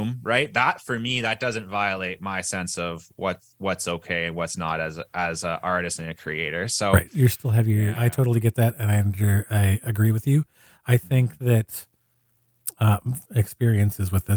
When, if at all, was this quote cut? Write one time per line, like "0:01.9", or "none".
0:07.9
0:13.2